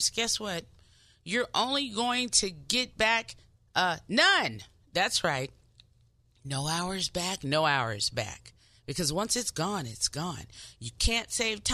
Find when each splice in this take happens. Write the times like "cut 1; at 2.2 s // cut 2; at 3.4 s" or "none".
none